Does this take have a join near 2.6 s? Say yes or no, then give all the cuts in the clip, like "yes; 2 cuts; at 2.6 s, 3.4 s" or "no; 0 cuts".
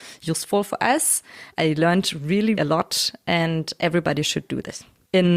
yes; 2 cuts; at 1.5 s, 2.6 s